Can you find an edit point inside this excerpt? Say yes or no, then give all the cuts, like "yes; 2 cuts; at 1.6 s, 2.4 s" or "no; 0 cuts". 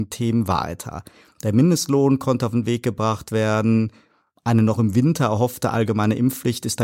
no; 0 cuts